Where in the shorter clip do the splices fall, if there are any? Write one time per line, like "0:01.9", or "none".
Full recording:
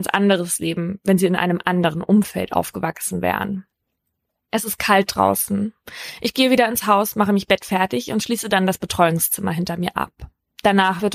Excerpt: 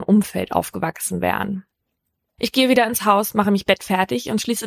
0:02.4